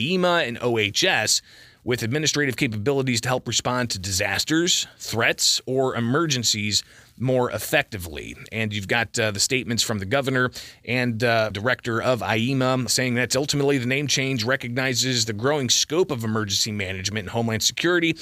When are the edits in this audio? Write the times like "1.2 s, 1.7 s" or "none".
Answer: 11.5 s, 12.9 s